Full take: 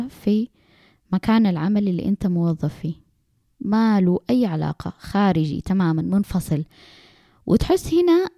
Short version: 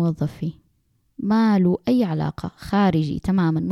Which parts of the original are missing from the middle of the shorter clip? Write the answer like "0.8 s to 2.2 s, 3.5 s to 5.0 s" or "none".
none

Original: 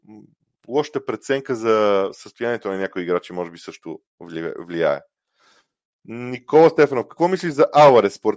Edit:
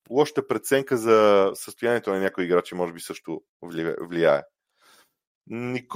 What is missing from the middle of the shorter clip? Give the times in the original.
none

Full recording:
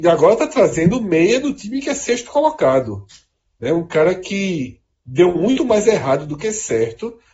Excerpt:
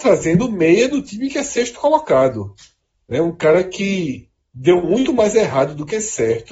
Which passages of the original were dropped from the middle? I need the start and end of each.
none

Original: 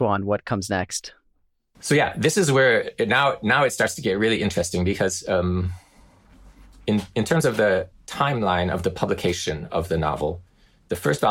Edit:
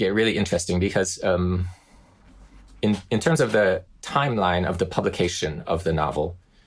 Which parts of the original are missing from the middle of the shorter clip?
none

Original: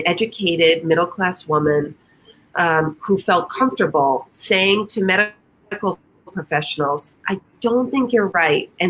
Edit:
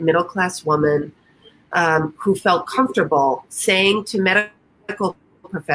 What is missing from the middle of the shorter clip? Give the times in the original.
none

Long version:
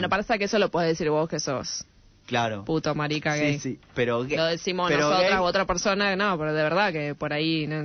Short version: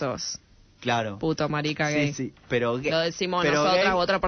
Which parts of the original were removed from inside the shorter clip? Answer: none

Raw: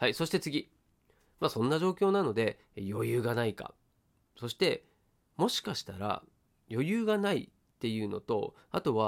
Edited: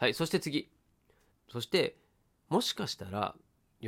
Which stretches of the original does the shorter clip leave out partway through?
1.3 s to 4.2 s

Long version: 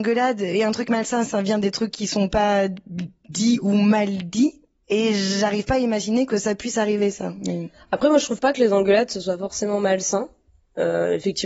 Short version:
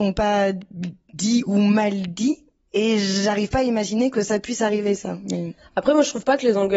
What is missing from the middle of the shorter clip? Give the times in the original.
none

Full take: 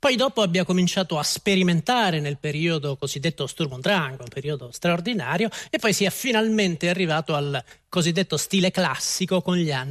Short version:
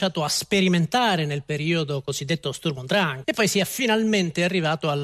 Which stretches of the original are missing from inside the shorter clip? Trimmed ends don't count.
4.2 s to 5.7 s

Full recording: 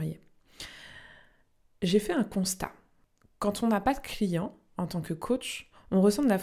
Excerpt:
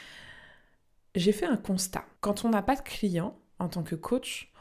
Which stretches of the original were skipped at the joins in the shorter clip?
2.8 s to 3.3 s

